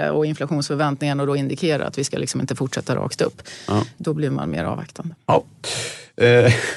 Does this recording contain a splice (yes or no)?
yes